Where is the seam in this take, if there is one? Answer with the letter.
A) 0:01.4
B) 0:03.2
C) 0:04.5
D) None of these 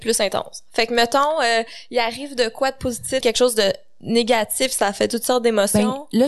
B